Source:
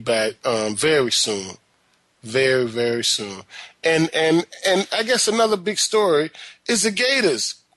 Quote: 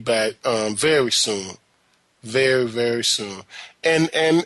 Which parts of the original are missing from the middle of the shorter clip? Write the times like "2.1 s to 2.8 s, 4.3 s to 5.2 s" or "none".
none